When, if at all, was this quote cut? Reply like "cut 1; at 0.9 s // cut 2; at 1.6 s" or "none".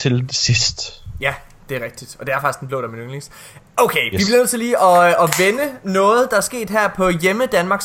none